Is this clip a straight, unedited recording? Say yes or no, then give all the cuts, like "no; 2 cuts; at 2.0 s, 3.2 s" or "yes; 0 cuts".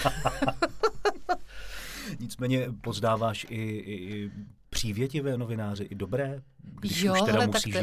yes; 0 cuts